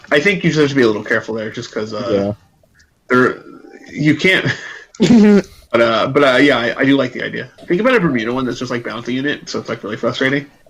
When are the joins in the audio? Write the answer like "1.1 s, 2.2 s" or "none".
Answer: 4.9 s, 9.5 s